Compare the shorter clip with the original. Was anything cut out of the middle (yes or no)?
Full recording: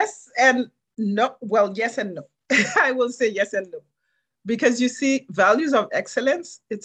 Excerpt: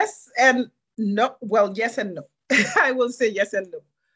no